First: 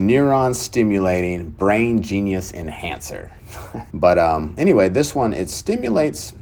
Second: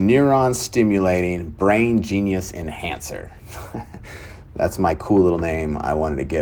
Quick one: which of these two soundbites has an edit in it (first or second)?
first